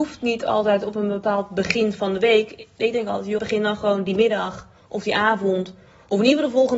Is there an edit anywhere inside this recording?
yes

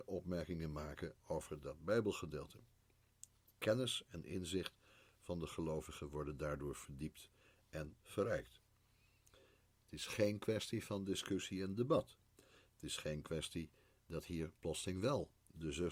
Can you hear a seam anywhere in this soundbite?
no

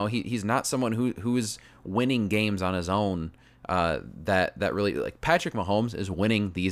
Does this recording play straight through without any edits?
yes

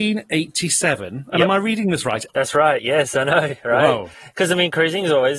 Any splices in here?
yes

